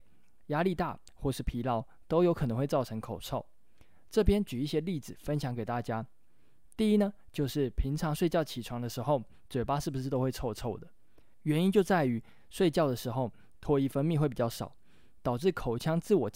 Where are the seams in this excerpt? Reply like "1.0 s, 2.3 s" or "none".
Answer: none